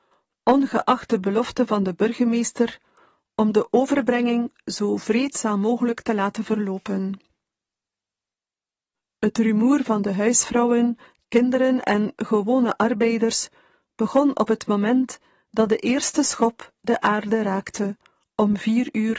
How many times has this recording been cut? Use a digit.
0